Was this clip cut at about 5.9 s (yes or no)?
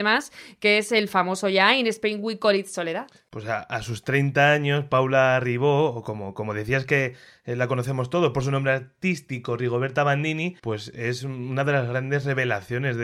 no